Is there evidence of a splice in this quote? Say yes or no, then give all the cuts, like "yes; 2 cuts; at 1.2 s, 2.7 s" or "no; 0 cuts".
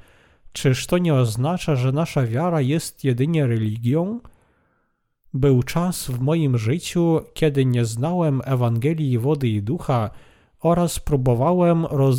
no; 0 cuts